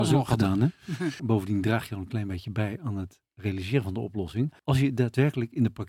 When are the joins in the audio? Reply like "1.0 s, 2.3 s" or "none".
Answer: 1.2 s, 4.6 s